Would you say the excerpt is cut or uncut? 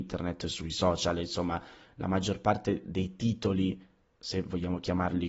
uncut